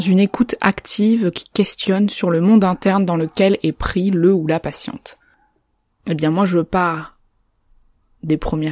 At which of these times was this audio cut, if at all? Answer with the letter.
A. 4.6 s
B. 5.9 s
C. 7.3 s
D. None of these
B